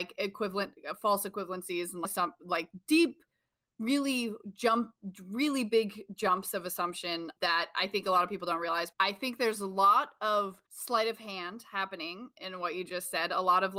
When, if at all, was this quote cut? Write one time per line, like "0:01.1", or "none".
0:08.9
0:10.7